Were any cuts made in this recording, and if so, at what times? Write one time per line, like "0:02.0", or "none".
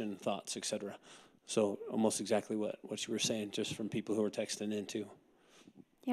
none